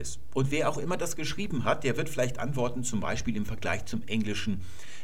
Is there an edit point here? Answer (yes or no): no